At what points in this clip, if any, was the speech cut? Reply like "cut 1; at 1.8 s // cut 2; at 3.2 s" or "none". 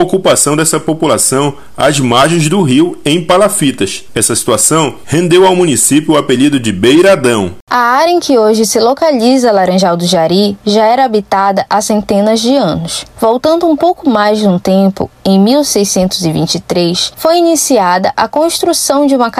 none